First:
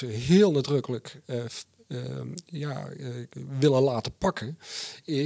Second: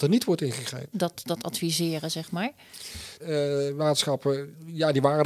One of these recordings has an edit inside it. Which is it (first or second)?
second